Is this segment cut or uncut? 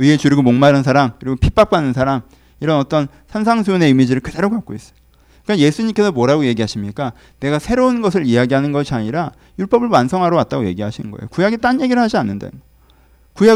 uncut